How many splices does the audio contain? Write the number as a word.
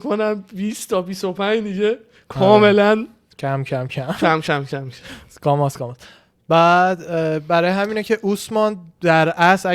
one